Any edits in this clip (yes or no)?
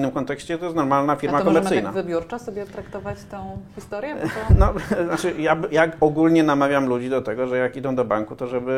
no